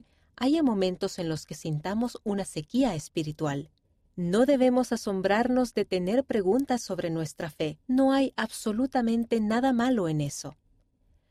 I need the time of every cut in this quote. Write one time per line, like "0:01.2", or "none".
0:04.1
0:07.8